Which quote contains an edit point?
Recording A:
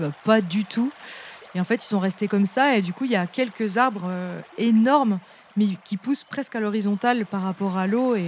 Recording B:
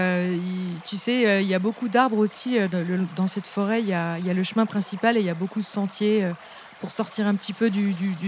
A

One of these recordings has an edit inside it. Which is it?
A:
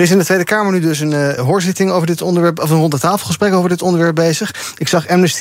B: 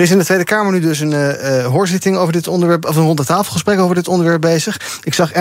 A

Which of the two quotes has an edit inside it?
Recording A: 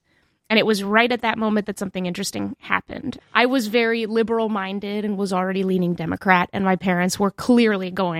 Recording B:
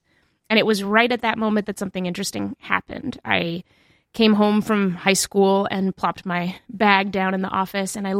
A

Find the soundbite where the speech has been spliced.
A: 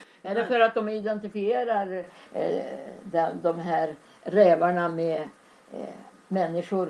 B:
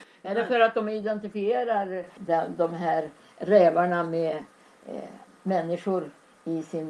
B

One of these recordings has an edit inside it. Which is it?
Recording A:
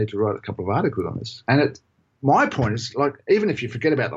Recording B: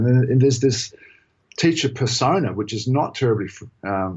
A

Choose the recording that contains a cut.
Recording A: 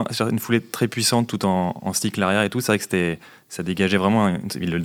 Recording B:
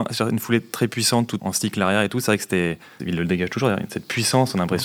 B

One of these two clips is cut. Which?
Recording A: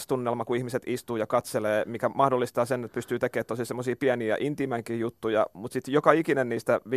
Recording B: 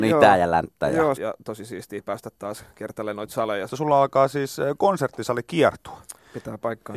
B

